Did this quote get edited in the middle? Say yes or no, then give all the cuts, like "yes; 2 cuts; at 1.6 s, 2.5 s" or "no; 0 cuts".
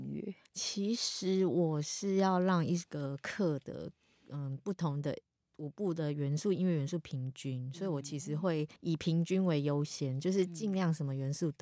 yes; 1 cut; at 8.8 s